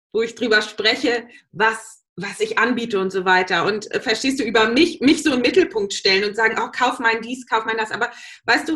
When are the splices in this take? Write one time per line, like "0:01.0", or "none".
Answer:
0:02.1